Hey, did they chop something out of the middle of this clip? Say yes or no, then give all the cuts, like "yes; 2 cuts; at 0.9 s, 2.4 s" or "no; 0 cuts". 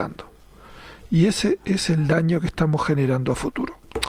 no; 0 cuts